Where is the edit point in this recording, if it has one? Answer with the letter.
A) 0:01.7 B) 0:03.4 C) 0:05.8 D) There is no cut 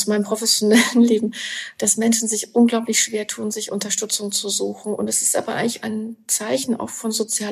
C